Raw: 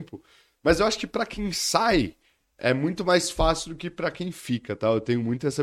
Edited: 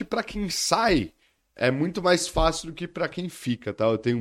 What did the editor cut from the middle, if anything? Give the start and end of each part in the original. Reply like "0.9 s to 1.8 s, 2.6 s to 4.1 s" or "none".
none